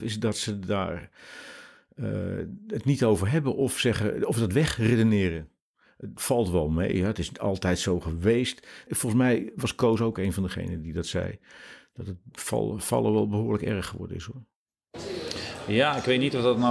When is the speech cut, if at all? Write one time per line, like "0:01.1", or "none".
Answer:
0:08.9